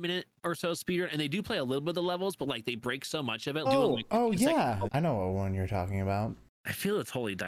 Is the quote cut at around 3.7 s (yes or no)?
yes